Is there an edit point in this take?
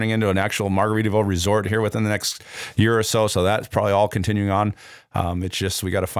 no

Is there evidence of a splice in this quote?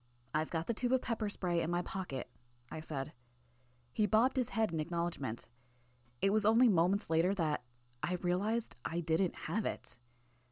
no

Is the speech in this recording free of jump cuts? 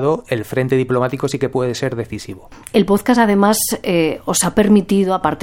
yes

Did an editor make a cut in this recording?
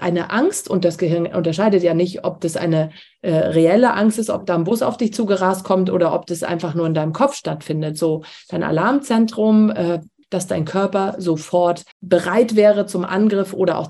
yes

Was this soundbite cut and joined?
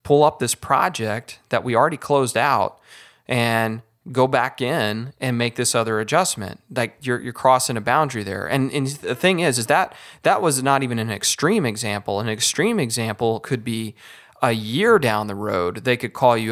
no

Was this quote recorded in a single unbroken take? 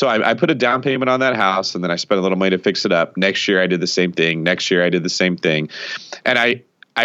yes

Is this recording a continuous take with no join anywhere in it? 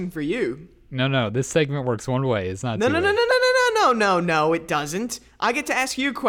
yes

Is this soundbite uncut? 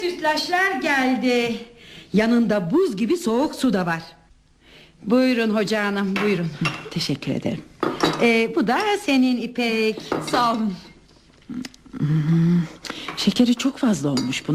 yes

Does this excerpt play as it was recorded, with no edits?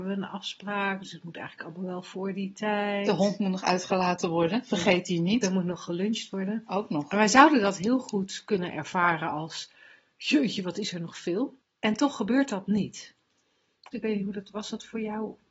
no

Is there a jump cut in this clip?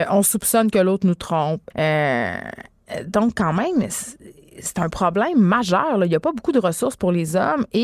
yes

